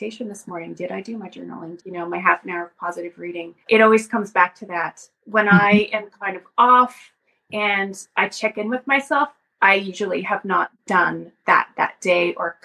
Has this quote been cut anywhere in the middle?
yes; 2 cuts; at 1.8 s, 3.6 s

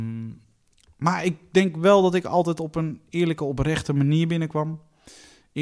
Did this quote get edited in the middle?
no; 0 cuts

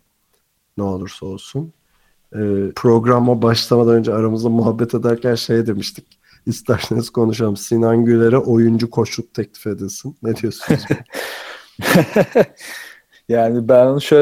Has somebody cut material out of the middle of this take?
yes; 1 cut; at 2.7 s

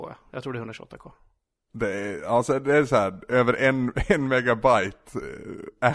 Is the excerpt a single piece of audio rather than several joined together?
yes; 0 cuts

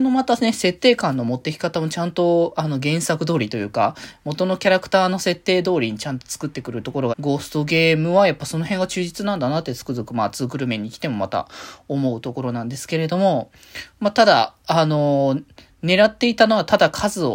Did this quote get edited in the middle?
yes; 1 cut; at 7.1 s

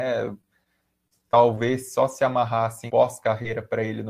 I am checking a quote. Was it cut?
yes; 1 cut; at 2.9 s

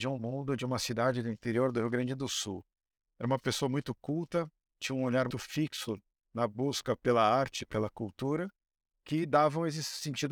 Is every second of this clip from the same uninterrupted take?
no; 1 cut; at 5.3 s

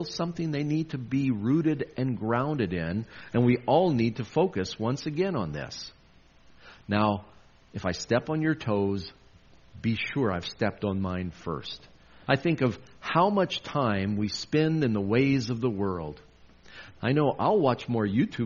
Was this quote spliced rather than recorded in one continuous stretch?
yes; 2 cuts; at 12.3 s, 17.0 s

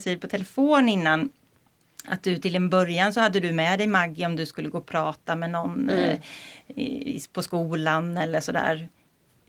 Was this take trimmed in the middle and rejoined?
no; 0 cuts

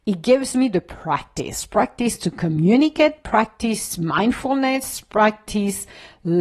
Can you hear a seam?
no; 0 cuts

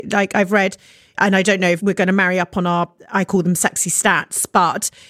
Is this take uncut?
yes; 0 cuts

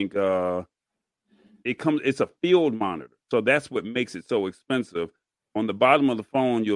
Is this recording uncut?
no; 1 cut; at 1.6 s

